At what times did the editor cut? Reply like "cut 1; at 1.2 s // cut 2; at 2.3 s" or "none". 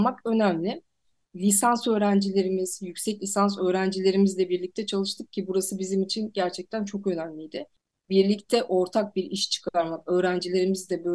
cut 1; at 1.2 s